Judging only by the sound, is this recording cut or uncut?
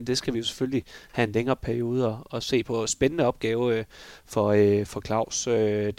uncut